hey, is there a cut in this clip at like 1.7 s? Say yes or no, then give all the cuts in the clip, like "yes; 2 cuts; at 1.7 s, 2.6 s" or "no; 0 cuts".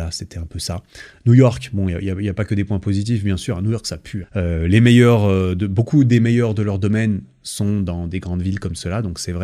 no; 1 cut; at 4.2 s